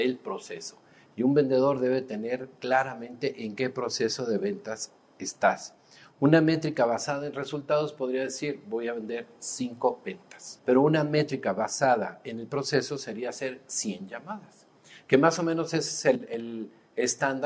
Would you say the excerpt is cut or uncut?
cut